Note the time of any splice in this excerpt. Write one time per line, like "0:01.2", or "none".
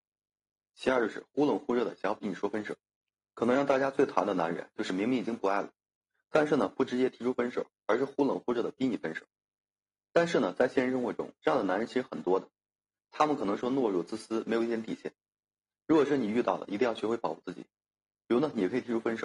none

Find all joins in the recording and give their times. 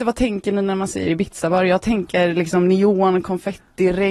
none

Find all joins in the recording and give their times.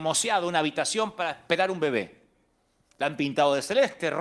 none

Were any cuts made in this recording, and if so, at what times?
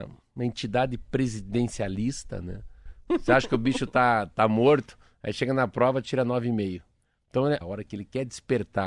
0:03.1
0:07.6

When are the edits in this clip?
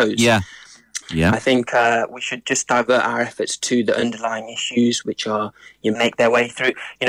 0:01.0
0:06.0

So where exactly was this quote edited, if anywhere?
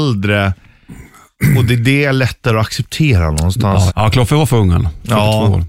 0:03.9

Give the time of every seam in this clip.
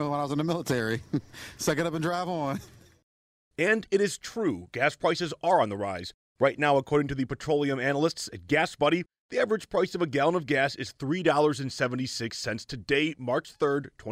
none

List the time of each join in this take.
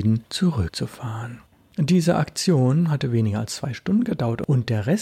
none

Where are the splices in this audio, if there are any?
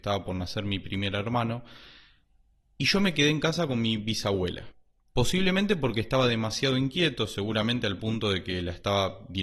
0:05.1

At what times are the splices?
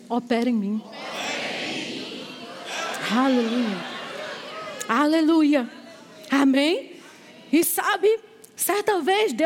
none

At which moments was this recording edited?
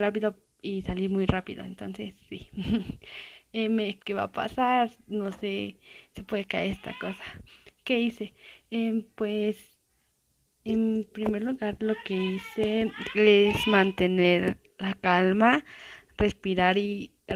0:04.0

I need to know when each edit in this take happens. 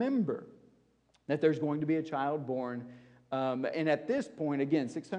0:03.7

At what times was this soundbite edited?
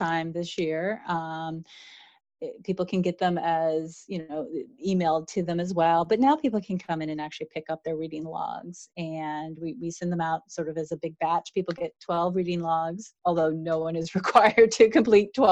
none

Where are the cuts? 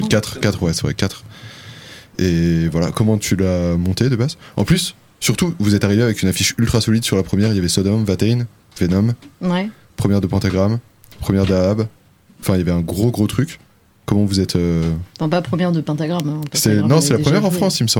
none

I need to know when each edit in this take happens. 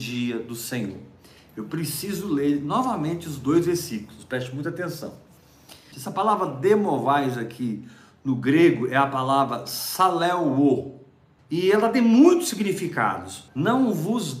0:05.9
0:11.4
0:13.5

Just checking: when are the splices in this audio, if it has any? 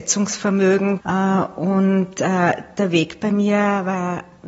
0:01.0

